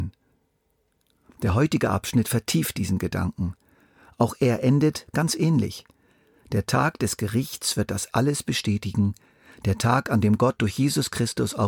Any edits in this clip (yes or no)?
no